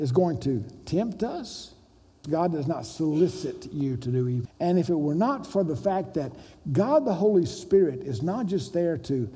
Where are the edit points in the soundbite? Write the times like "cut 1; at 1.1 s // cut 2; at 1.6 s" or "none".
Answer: cut 1; at 2.2 s // cut 2; at 4.5 s

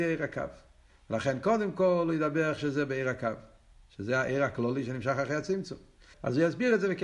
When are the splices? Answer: cut 1; at 6.1 s

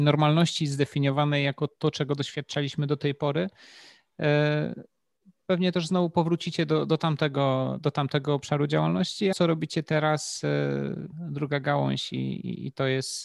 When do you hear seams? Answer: cut 1; at 9.3 s // cut 2; at 11.1 s

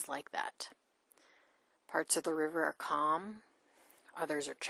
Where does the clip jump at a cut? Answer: cut 1; at 1.7 s

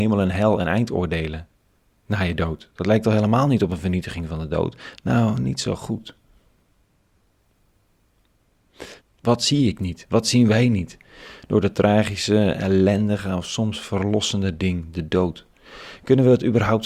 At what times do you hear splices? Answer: cut 1; at 5.0 s // cut 2; at 9.0 s

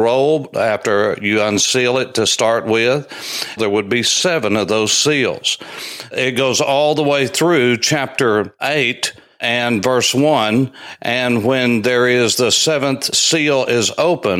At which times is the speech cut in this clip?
cut 1; at 3.6 s

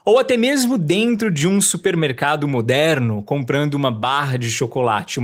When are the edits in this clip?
none

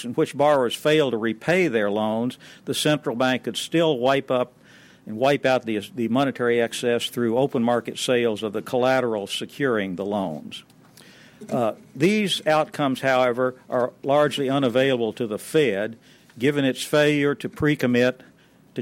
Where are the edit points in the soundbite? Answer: none

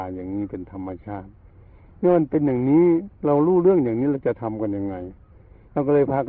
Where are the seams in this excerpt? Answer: none

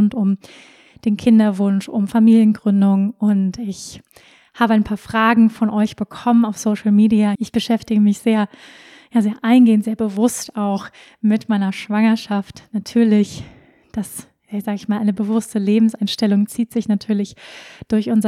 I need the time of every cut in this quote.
cut 1; at 7.4 s

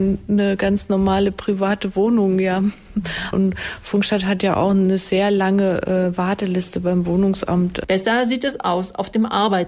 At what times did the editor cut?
cut 1; at 3.3 s

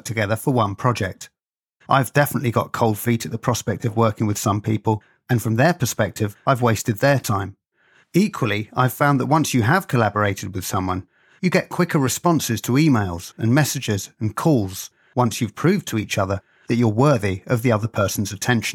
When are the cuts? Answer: cut 1; at 1.8 s

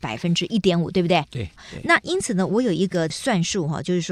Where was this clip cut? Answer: none

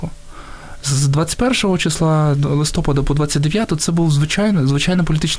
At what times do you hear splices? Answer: cut 1; at 2.5 s

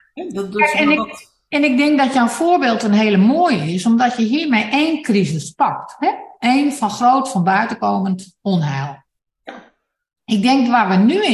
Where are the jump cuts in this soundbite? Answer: none

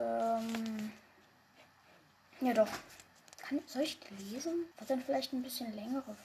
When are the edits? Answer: cut 1; at 4.7 s

